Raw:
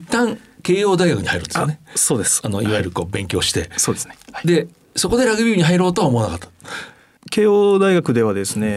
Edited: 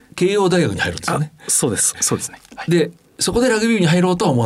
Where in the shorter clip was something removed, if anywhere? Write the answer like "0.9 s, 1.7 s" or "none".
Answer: 1.9 s